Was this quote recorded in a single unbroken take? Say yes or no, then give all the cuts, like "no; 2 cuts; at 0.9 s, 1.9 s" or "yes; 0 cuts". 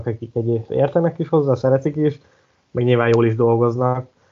yes; 0 cuts